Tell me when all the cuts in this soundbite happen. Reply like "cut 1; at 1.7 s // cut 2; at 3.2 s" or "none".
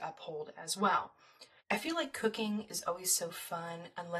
cut 1; at 1.6 s